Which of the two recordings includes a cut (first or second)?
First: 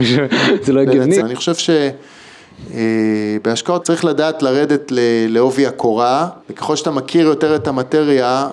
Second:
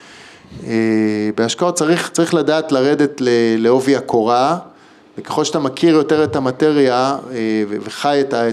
first